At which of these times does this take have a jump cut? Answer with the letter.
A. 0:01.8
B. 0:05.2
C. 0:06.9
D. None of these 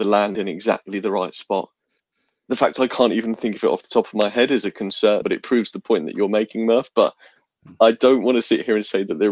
B